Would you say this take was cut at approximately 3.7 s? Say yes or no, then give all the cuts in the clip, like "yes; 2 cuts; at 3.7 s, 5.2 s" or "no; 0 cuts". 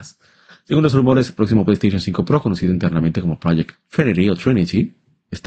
yes; 1 cut; at 3.7 s